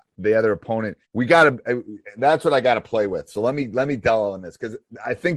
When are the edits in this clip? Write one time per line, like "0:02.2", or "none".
0:01.0

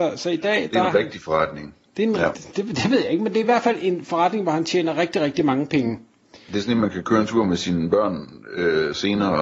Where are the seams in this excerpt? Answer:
none

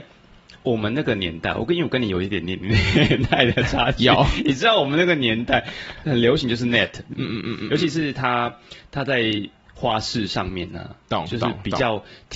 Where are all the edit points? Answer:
none

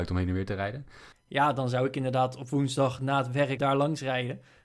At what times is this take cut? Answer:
0:01.1
0:03.6

